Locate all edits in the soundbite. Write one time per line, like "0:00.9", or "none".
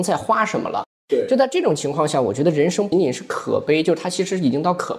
0:02.9